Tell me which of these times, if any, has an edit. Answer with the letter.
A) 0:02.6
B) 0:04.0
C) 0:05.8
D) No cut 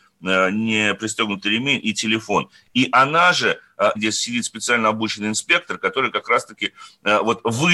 B